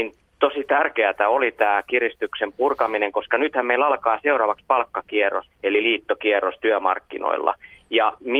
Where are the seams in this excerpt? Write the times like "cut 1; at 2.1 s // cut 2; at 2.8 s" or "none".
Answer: cut 1; at 5.5 s